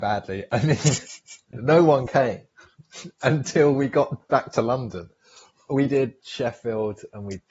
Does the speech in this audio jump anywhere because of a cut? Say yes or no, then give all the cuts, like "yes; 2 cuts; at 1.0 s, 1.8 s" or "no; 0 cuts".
yes; 1 cut; at 1.5 s